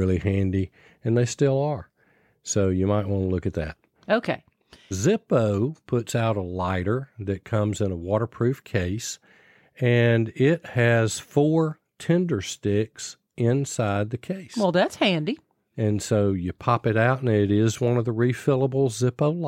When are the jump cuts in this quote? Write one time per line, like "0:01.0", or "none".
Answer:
0:04.9